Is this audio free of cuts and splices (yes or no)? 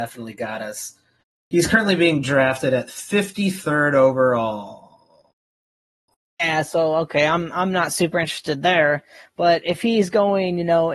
yes